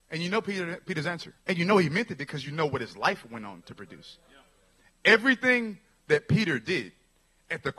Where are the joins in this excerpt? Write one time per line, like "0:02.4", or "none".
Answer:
0:01.4